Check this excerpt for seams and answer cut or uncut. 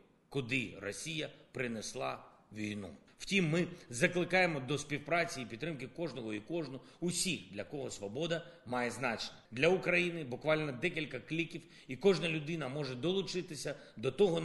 cut